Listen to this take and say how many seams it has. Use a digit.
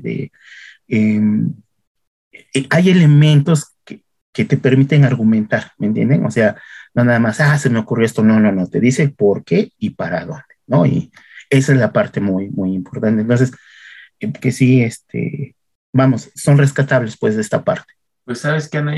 2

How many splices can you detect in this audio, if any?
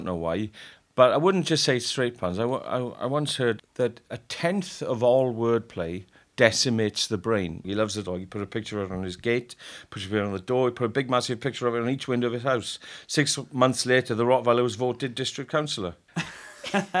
1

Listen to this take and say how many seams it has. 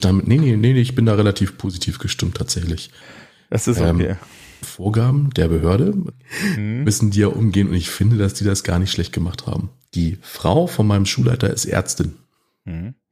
3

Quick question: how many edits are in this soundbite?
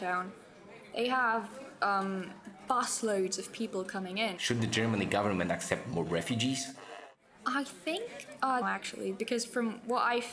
2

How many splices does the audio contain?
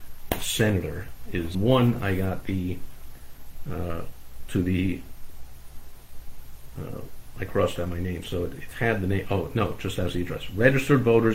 1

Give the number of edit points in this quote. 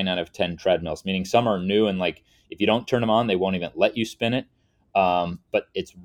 0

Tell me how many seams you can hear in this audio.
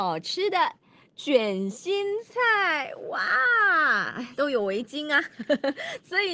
1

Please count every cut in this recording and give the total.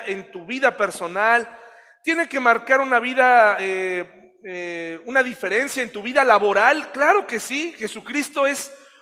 0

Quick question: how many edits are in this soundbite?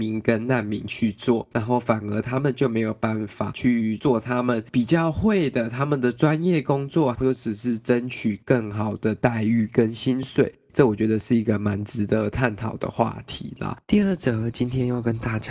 2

